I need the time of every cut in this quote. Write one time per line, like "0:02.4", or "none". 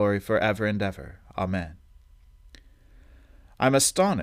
none